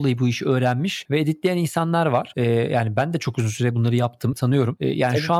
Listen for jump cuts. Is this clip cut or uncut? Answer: cut